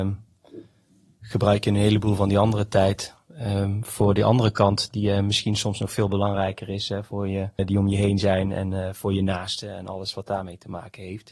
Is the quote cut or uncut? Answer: cut